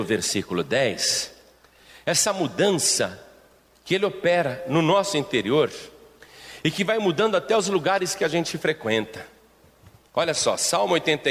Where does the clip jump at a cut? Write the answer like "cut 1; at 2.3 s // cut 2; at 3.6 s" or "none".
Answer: none